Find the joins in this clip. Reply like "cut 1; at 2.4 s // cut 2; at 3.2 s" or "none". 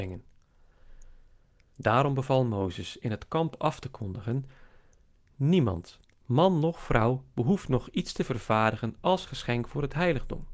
cut 1; at 1.7 s

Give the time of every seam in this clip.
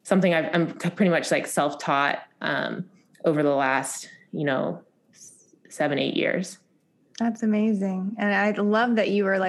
none

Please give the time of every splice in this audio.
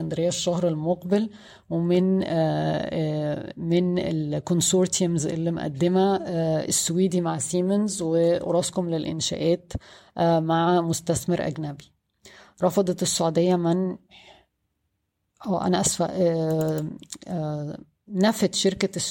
none

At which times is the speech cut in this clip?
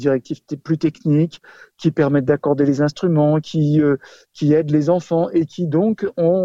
none

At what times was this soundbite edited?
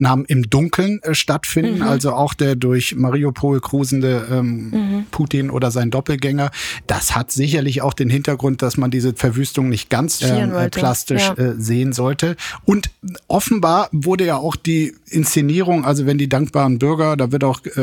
cut 1; at 10.2 s

